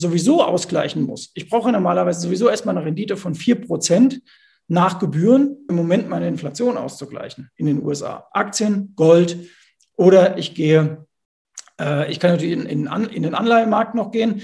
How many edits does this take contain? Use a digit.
2